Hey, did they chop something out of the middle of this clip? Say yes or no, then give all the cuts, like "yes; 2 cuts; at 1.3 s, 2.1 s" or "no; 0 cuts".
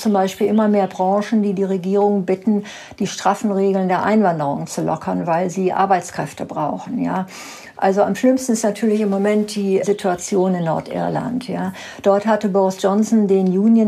yes; 1 cut; at 9.8 s